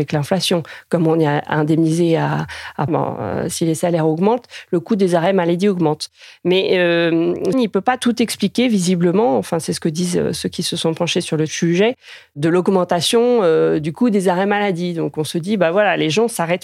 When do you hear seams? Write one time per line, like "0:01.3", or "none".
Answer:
0:02.9
0:07.5